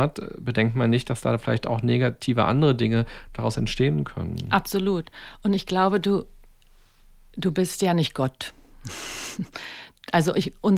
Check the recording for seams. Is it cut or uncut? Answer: uncut